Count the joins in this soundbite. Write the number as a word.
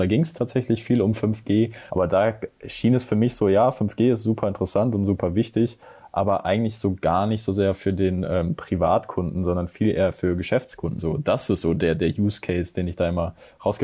two